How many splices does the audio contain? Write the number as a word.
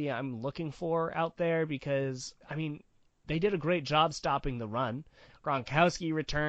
two